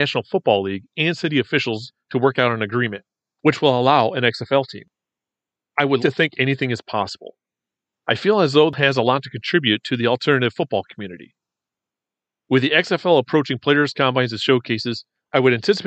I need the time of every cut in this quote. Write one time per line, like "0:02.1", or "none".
0:06.0
0:07.9

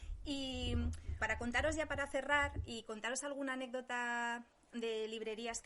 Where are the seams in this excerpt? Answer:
0:01.2

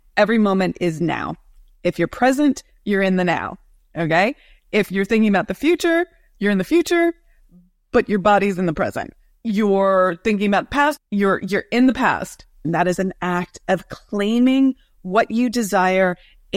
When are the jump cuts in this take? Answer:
0:11.0
0:12.6

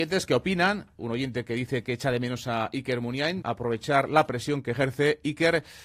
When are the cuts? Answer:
0:03.4

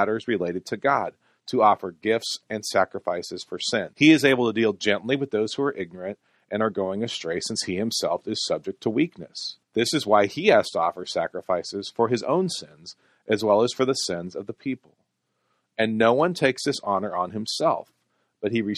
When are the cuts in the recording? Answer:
0:03.9
0:09.6

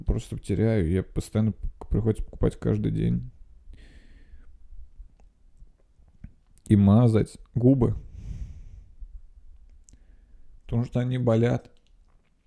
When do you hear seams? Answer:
none

